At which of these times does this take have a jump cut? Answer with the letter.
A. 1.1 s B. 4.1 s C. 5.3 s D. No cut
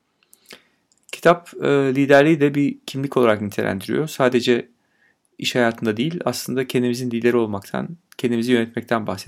D